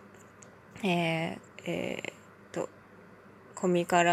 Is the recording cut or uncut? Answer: cut